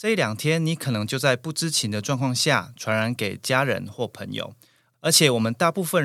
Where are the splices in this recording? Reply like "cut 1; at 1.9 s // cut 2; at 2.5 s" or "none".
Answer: none